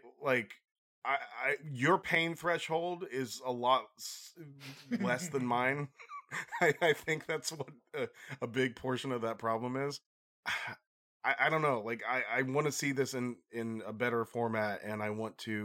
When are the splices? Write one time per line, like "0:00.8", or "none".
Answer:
none

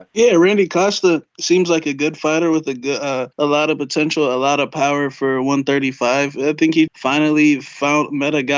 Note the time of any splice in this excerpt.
0:03.3
0:06.9

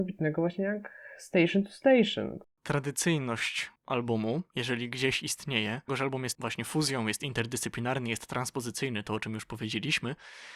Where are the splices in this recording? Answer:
0:05.9

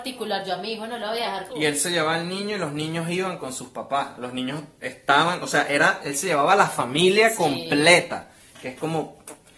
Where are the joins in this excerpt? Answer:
0:01.5

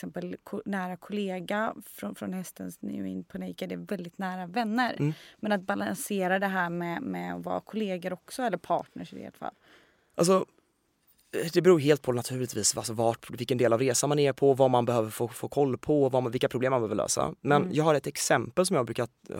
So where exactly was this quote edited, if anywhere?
none

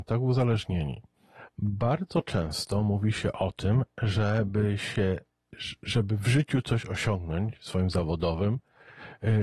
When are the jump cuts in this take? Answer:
0:01.5

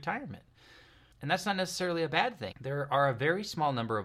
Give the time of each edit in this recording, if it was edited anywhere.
0:01.1
0:02.5

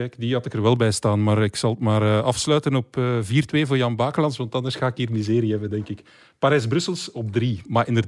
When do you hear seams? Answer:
none

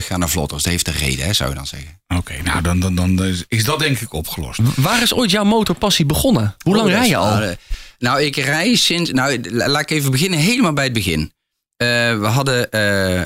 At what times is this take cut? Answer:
none

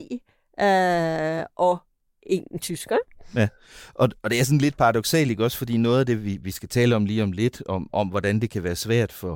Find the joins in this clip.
none

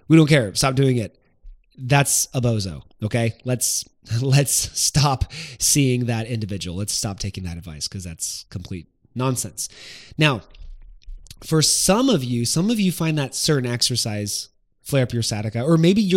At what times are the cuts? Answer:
none

